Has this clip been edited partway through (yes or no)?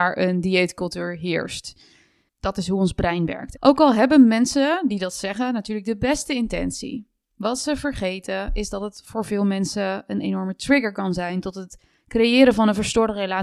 yes